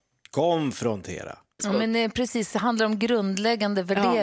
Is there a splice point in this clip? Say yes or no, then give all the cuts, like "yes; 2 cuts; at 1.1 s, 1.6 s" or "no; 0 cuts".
yes; 1 cut; at 1.6 s